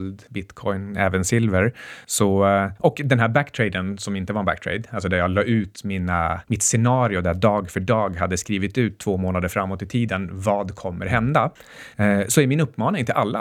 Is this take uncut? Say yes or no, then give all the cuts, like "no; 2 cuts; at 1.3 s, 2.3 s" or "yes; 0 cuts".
yes; 0 cuts